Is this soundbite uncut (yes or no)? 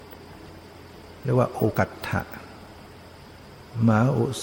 no